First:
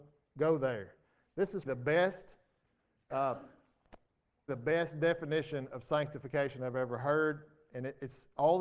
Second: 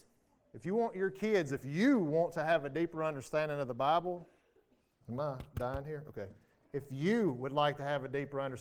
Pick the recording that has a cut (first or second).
first